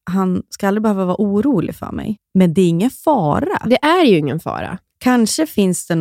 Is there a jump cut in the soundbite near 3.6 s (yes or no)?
no